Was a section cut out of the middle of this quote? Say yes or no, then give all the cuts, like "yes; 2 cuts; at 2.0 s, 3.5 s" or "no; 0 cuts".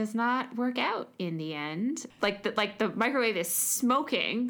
yes; 1 cut; at 2.1 s